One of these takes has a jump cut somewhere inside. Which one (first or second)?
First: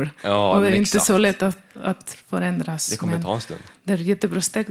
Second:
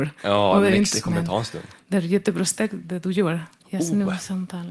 second